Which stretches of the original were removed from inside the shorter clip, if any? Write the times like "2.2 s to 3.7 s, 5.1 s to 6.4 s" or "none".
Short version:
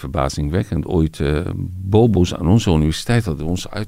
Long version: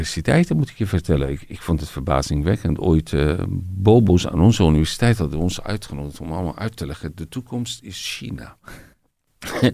none

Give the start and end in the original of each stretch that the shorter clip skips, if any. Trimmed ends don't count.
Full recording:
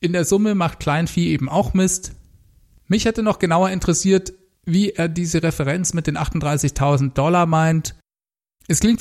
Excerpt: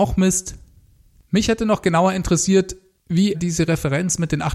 4.9 s to 5.1 s

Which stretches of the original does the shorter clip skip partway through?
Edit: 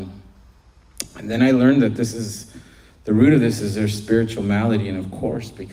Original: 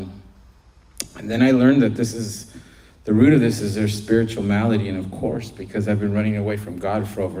none

